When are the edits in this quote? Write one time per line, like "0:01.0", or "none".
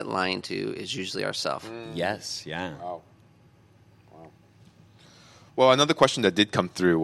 none